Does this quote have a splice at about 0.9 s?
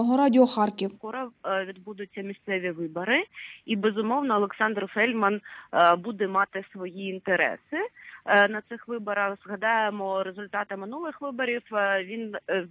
yes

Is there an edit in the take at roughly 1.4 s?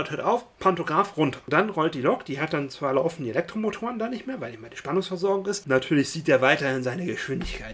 no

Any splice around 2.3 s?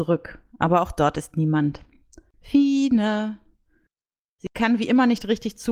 yes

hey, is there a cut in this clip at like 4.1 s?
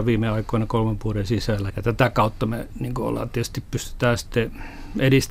no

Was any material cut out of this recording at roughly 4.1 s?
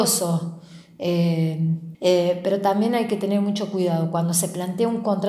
no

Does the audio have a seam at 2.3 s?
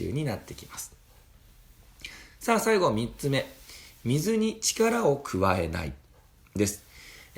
no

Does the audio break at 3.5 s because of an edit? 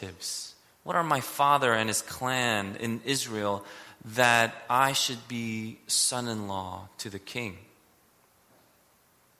no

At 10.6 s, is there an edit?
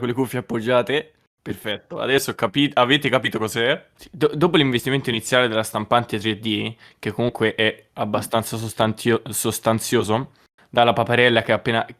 yes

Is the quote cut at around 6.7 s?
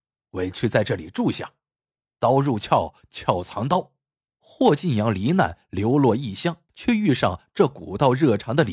yes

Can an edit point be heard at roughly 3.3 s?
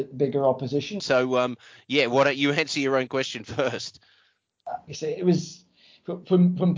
no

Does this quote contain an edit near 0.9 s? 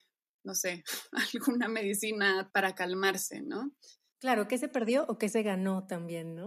no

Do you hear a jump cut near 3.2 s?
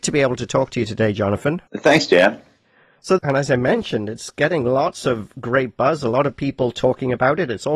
yes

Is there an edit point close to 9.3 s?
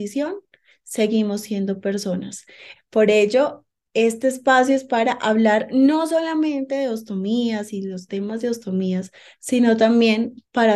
no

